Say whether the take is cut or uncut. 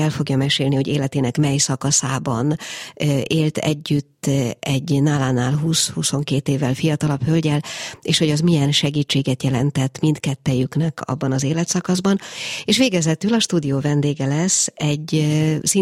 uncut